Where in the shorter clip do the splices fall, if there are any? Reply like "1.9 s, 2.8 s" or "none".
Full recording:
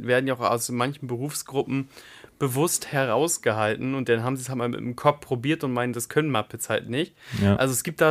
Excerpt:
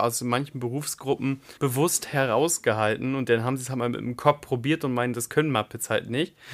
1.6 s